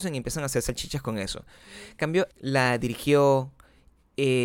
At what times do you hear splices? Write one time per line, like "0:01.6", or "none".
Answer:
0:02.3